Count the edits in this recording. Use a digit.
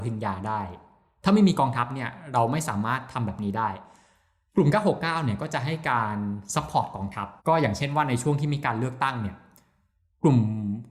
1